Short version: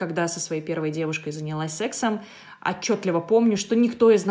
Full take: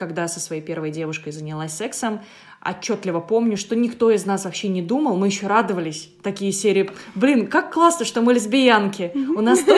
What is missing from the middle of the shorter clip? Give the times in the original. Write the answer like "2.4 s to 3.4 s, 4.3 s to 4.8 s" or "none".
none